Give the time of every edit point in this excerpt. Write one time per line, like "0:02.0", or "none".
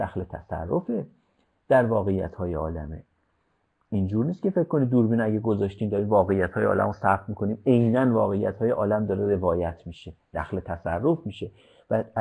none